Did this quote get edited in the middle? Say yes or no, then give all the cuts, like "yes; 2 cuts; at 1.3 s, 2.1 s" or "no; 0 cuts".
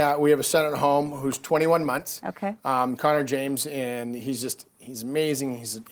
no; 0 cuts